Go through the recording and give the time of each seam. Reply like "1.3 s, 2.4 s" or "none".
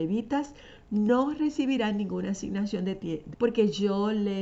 3.3 s